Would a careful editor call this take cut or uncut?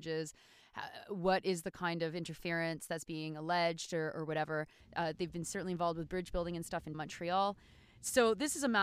cut